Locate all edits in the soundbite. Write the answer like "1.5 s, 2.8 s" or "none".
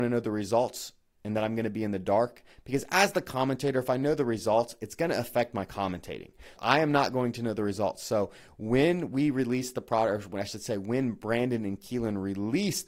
6.6 s